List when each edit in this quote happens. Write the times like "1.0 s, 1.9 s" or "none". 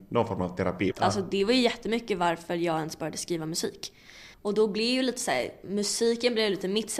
0.9 s, 4.3 s